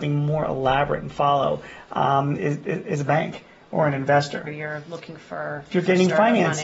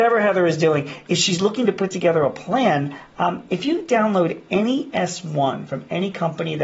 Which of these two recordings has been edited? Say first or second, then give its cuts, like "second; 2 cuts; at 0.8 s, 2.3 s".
first; 2 cuts; at 2.4 s, 4.5 s